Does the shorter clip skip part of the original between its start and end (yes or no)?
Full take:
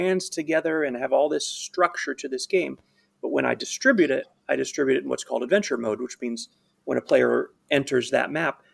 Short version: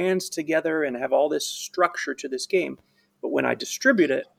no